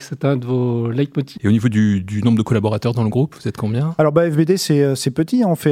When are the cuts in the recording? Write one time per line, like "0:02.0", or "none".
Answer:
0:01.3